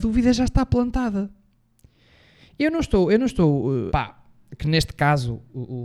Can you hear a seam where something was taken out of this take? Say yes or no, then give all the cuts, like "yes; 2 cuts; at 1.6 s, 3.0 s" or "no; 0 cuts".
yes; 1 cut; at 3.9 s